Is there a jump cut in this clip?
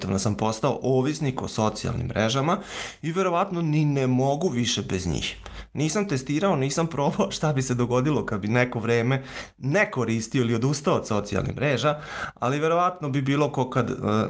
no; 0 cuts

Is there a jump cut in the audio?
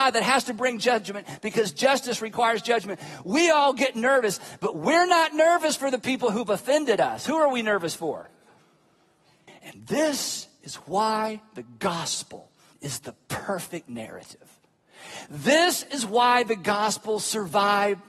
yes; 1 cut; at 9.5 s

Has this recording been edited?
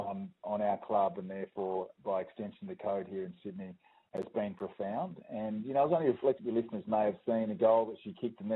yes; 1 cut; at 6.4 s

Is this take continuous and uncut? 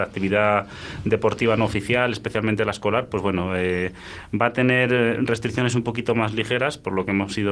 yes; 0 cuts

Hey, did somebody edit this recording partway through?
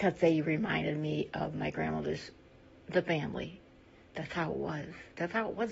no; 0 cuts

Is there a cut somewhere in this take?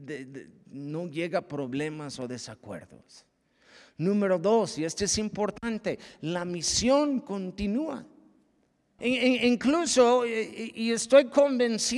yes; 1 cut; at 9.0 s

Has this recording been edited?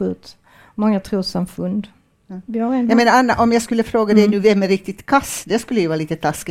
no; 0 cuts

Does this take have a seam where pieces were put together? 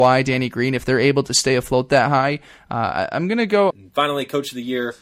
yes; 1 cut; at 3.7 s

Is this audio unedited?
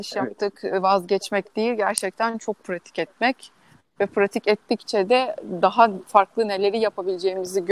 yes; 0 cuts

